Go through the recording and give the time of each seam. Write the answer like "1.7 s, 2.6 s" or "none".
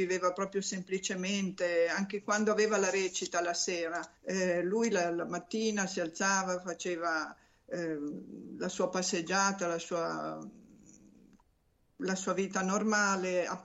4.2 s